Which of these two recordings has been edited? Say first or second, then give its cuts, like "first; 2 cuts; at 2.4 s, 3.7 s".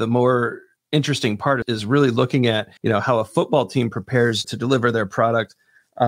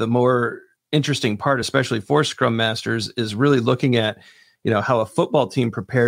first; 3 cuts; at 1.6 s, 2.8 s, 4.4 s